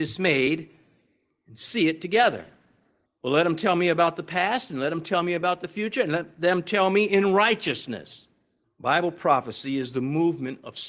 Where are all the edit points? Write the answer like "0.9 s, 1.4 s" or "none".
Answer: 3.1 s, 8.6 s